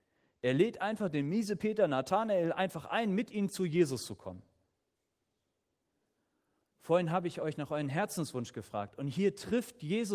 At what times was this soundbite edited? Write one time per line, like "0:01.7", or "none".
0:06.6